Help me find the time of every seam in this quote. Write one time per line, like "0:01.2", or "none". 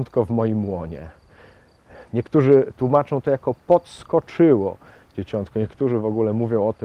none

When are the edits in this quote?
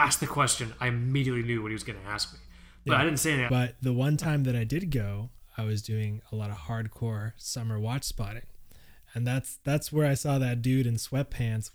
0:03.5

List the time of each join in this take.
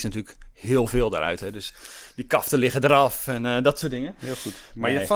none

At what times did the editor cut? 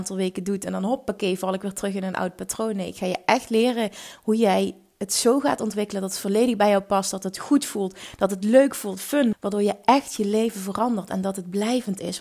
0:09.3

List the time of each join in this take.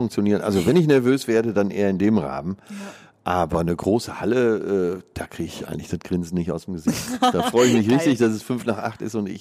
none

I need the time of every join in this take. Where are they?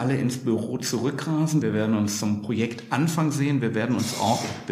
0:01.6

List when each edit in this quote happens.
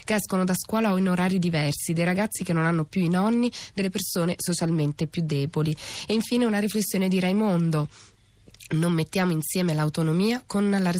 none

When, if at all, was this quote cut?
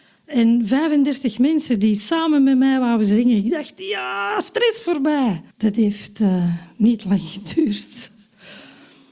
0:05.5

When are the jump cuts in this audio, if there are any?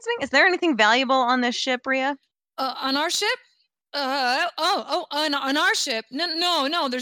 none

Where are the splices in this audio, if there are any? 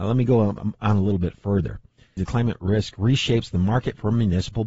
0:02.2

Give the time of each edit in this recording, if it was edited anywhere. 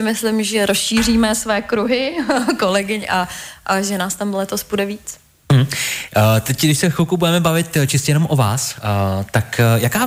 none

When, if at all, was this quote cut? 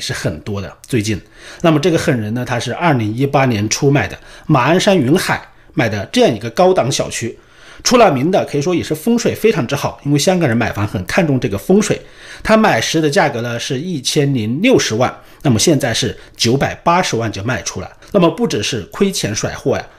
0:18.0

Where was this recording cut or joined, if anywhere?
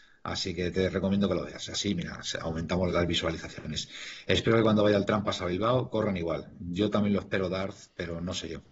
0:02.9

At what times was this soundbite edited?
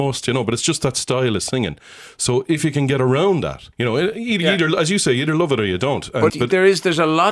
0:03.7
0:06.3

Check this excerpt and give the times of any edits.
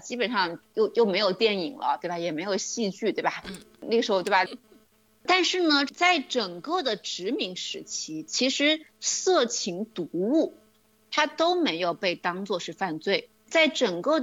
0:04.5

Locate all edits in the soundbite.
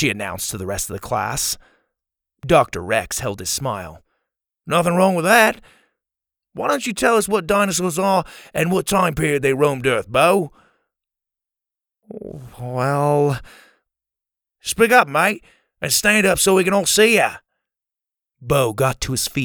none

